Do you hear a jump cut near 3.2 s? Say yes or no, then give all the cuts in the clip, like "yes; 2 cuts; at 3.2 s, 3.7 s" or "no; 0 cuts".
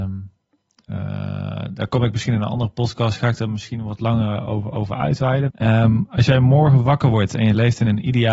no; 1 cut; at 5.5 s